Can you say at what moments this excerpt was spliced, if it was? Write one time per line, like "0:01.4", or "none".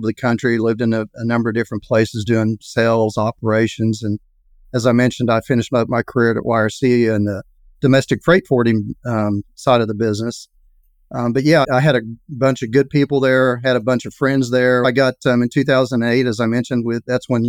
0:11.6
0:14.8